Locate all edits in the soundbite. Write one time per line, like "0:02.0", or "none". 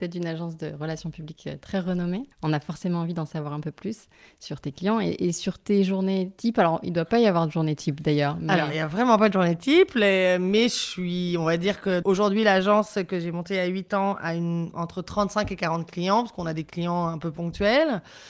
0:02.3
0:12.0